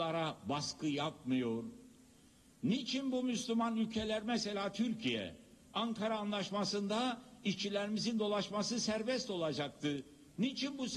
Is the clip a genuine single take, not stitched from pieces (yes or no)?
yes